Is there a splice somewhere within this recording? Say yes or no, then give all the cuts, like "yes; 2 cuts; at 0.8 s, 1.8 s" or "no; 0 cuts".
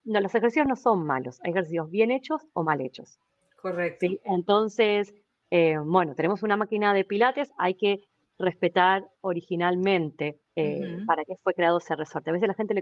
yes; 1 cut; at 10.5 s